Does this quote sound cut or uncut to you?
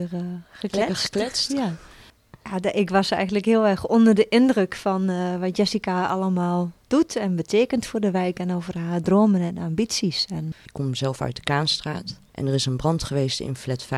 cut